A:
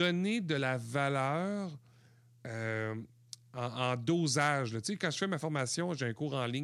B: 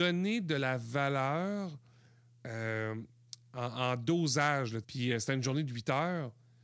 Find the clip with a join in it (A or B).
B